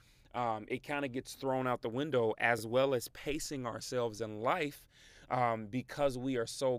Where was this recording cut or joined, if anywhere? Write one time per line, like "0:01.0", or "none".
none